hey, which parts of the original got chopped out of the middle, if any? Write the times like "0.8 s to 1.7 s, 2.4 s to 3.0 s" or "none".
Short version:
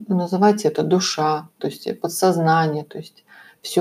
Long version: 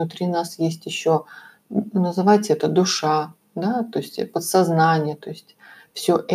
3.4 s to 3.9 s